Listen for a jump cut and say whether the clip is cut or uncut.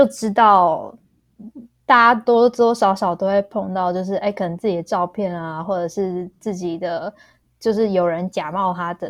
cut